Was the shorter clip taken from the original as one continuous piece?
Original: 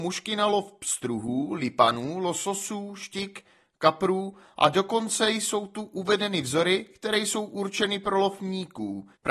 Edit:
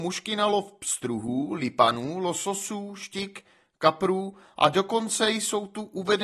yes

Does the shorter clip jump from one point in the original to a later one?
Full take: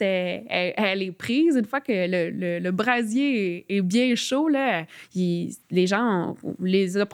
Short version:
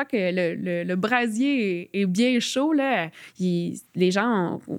no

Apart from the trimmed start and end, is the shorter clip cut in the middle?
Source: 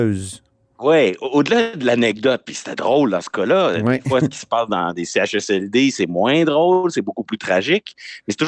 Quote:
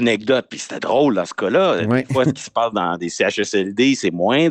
no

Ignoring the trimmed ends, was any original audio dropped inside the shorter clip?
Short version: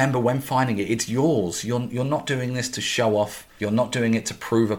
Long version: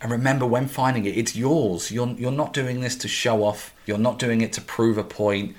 no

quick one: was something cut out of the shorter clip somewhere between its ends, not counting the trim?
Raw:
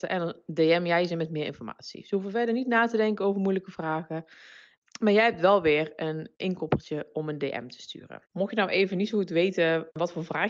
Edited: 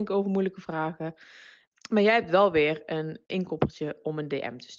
no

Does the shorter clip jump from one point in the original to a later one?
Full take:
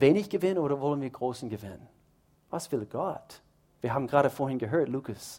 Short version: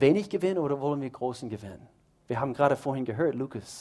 yes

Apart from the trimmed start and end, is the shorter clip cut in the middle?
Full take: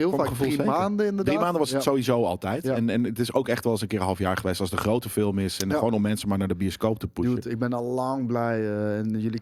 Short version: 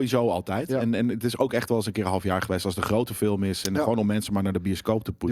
no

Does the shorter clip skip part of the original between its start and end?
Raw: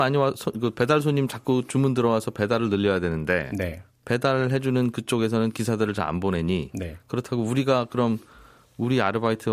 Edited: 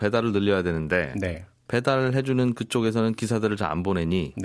no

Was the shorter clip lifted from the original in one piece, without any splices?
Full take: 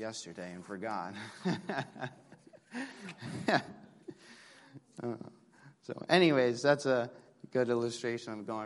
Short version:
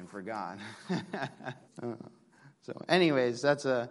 no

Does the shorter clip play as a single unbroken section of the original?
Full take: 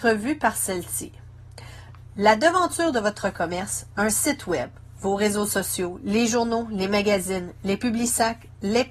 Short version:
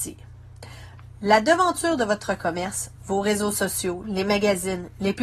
no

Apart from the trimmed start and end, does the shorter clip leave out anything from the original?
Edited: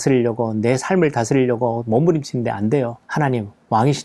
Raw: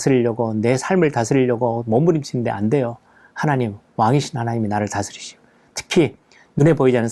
yes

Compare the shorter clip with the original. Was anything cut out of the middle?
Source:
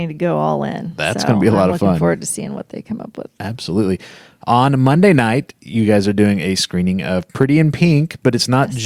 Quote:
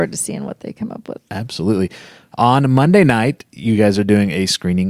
no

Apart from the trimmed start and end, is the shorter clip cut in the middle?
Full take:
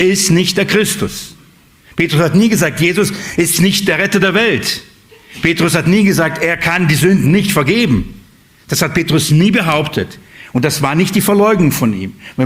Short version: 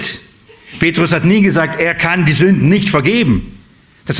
no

